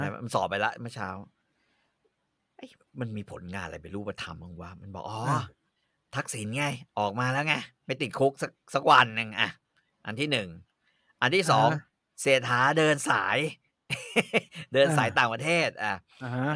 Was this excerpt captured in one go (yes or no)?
no